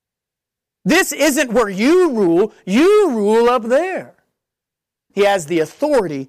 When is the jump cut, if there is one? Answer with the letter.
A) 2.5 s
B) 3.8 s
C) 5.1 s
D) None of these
C